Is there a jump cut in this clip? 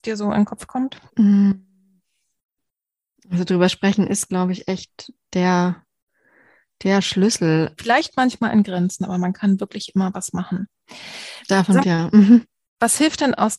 yes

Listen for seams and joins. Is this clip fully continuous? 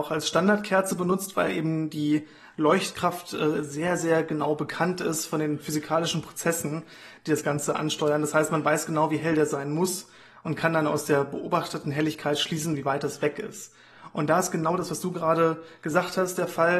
yes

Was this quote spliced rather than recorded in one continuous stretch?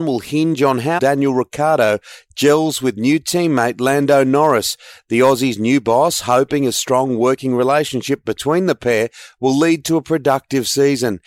yes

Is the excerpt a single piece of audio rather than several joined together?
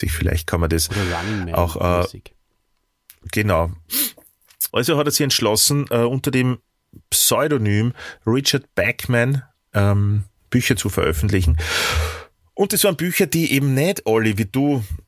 no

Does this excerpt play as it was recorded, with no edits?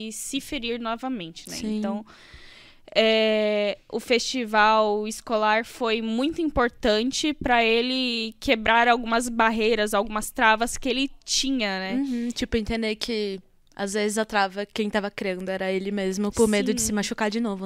yes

